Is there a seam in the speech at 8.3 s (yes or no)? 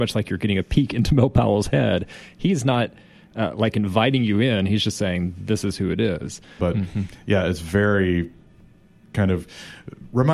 no